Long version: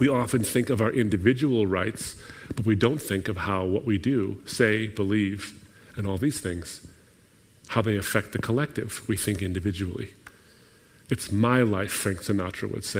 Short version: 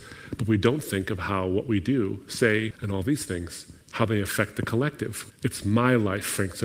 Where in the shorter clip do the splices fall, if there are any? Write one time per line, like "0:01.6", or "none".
0:02.7
0:03.8
0:05.3